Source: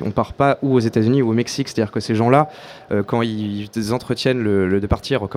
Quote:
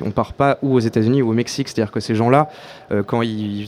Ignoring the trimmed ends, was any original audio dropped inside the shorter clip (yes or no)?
no